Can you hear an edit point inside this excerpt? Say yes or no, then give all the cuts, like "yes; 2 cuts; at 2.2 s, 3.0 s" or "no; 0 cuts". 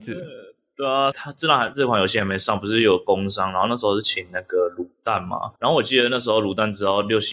yes; 2 cuts; at 1.1 s, 5.6 s